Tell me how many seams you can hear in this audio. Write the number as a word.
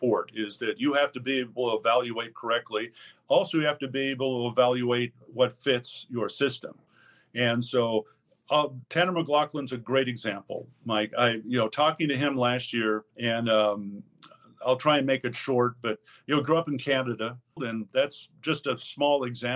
two